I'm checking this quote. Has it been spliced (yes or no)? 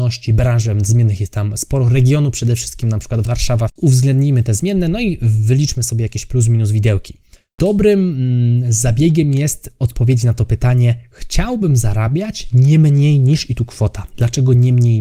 yes